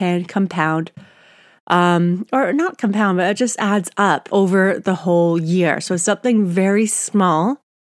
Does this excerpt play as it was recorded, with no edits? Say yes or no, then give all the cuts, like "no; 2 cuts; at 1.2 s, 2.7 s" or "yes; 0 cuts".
no; 1 cut; at 4.3 s